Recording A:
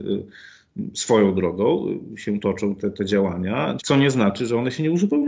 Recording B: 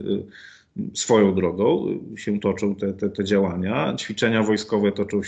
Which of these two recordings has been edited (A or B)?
A